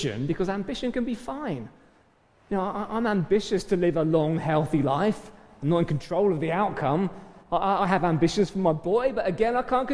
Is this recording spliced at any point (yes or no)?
no